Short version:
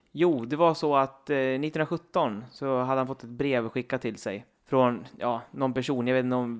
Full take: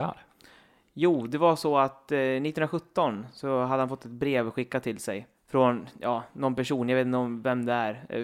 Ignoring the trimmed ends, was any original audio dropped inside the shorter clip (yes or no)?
no